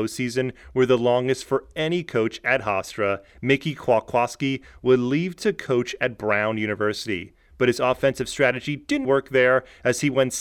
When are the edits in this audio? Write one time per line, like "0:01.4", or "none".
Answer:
0:03.3
0:09.0